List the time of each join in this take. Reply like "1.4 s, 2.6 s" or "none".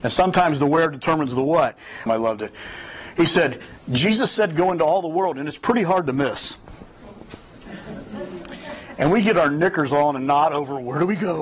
2.1 s